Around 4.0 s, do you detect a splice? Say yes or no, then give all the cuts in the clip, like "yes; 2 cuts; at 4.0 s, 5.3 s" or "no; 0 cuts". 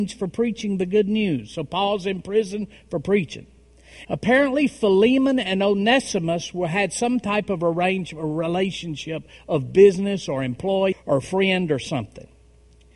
yes; 2 cuts; at 4.0 s, 10.9 s